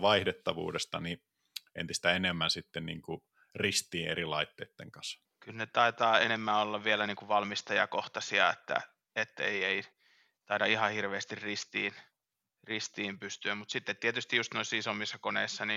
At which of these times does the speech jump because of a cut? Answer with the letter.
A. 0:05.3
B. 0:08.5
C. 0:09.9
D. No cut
D